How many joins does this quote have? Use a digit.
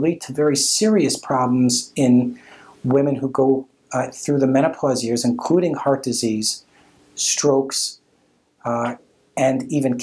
0